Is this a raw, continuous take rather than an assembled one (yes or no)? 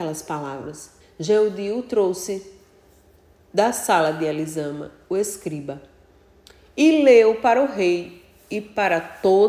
no